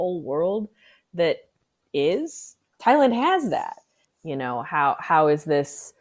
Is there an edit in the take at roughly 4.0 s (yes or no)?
yes